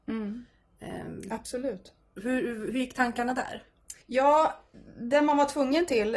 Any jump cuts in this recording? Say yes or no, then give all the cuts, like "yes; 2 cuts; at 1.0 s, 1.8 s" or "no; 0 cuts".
yes; 1 cut; at 4.0 s